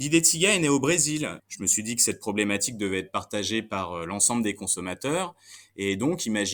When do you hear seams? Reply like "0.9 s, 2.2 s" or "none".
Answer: 1.4 s